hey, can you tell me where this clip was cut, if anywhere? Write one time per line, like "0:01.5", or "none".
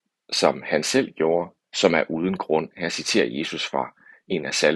0:01.6